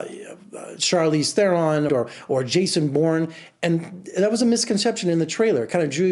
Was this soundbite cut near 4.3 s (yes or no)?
no